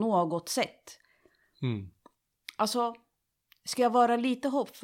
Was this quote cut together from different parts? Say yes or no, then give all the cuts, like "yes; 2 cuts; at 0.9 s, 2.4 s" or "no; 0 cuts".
no; 0 cuts